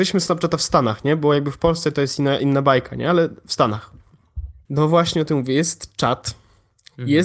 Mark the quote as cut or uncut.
cut